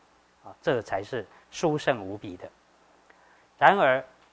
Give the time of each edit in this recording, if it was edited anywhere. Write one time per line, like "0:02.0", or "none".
0:03.4